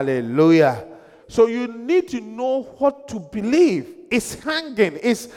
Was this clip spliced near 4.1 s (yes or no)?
no